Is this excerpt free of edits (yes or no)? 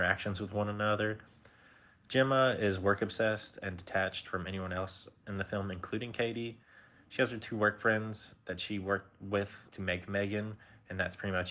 no